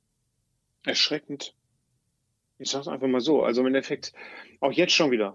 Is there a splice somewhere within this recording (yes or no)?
no